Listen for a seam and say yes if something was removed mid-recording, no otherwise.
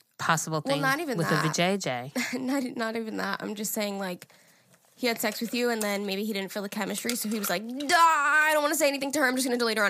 no